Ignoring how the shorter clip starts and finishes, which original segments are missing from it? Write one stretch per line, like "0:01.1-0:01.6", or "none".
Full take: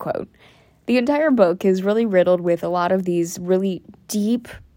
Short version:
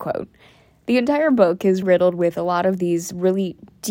0:01.8-0:02.1